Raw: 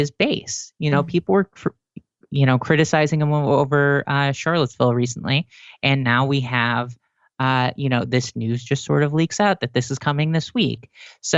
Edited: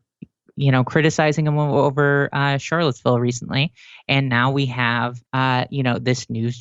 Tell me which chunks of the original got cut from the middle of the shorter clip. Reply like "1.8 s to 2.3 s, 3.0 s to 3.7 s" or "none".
7.0 s to 7.3 s